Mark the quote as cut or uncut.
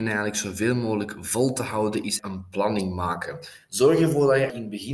uncut